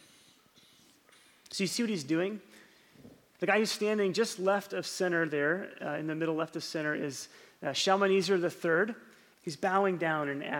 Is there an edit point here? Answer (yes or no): yes